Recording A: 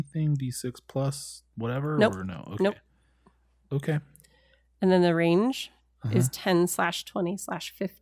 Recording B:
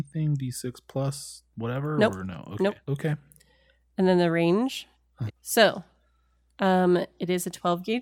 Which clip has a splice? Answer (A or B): B